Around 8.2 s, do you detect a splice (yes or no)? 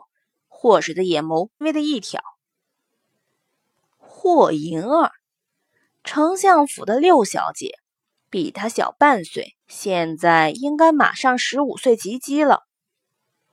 no